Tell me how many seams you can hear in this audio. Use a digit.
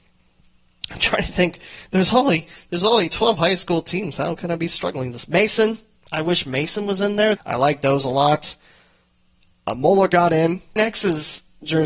2